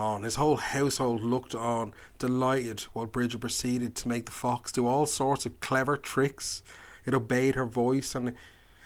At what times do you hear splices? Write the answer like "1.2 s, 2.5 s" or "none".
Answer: none